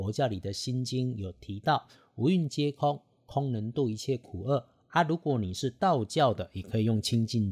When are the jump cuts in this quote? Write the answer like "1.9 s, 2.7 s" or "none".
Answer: none